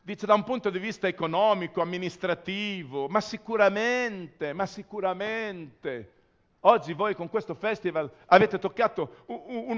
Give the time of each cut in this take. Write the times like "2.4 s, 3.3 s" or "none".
none